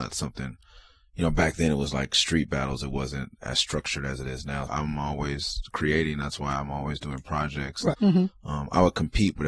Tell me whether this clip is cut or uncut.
cut